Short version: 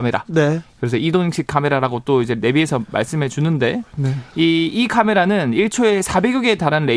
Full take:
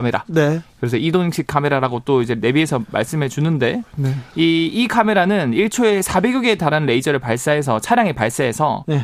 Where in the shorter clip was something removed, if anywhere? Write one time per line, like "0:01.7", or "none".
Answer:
none